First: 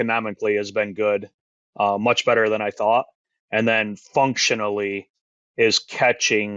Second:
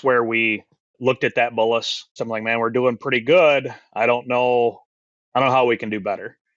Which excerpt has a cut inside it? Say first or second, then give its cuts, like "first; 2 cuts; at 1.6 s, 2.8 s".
second; 2 cuts; at 0.9 s, 2.2 s